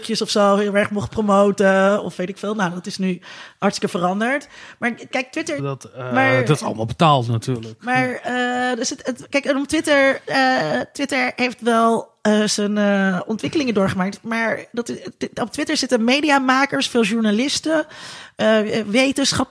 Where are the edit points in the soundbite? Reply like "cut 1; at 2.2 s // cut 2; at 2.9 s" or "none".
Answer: cut 1; at 5.6 s

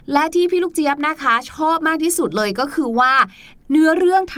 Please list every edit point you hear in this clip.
none

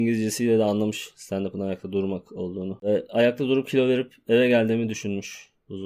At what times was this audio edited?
none

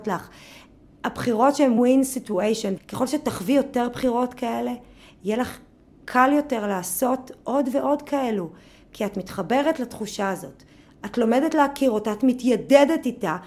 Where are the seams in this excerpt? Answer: cut 1; at 1.8 s // cut 2; at 2.8 s

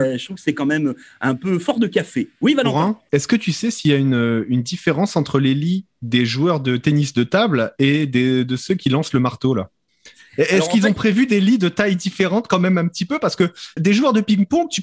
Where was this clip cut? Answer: cut 1; at 3.1 s // cut 2; at 13.8 s

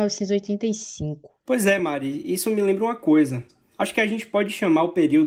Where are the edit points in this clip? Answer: none

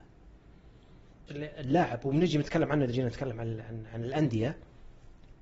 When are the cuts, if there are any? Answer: cut 1; at 1.3 s

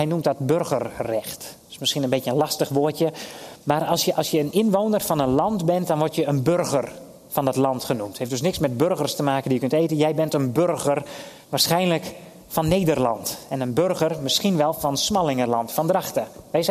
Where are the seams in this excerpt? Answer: none

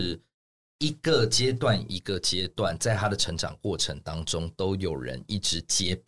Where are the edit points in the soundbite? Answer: none

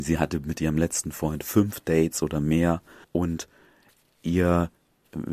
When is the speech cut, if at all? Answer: cut 1; at 3.0 s

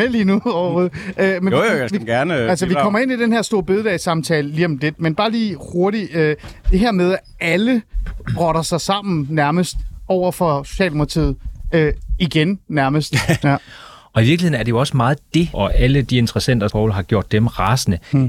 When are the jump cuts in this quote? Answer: cut 1; at 13.4 s // cut 2; at 15.5 s // cut 3; at 16.7 s

